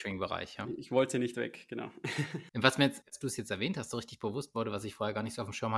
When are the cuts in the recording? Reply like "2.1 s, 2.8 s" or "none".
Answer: 2.5 s